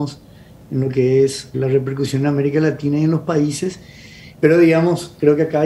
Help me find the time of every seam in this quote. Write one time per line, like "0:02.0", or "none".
0:01.5
0:04.3